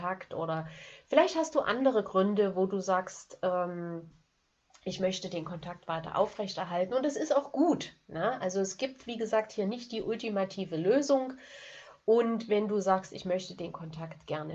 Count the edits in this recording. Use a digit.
0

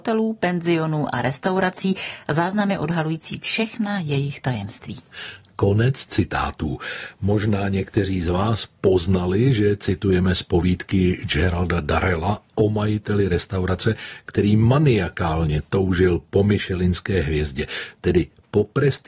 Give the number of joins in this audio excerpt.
0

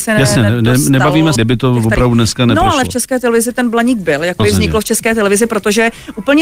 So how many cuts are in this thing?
2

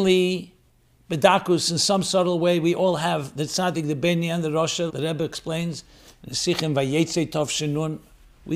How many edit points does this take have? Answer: 1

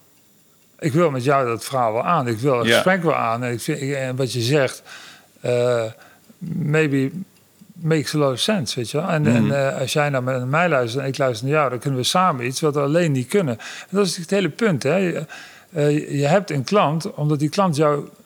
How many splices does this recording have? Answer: 0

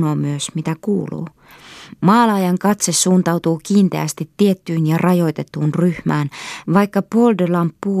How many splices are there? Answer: 1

